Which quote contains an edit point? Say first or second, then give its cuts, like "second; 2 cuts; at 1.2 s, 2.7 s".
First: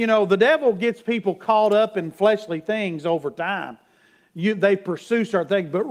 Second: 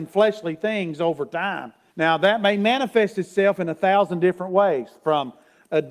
second; 1 cut; at 1.9 s